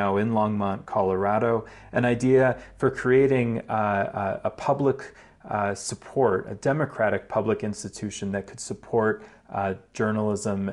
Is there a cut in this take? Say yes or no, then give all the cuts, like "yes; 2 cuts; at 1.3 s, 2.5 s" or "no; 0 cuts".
no; 0 cuts